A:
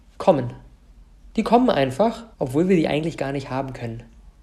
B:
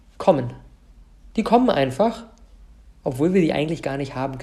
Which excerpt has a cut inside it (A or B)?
A